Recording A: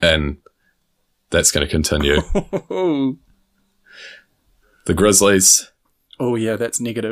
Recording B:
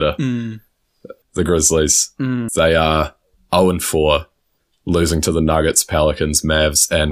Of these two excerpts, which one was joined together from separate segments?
B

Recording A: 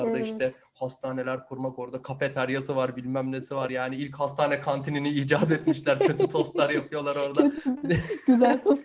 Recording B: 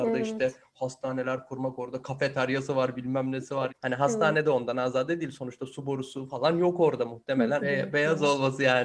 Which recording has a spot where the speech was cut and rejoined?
B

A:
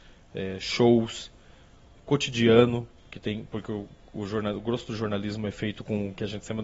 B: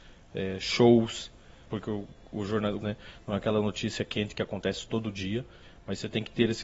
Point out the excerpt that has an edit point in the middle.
B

